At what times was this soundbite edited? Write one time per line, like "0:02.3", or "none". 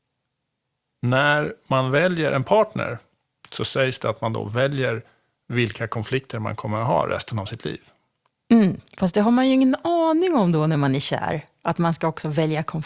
none